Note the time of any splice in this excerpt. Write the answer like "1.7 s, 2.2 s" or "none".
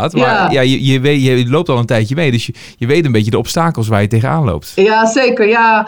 none